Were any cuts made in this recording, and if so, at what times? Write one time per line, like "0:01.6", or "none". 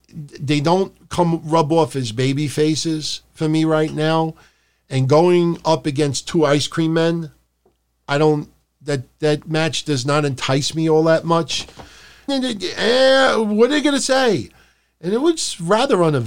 0:12.3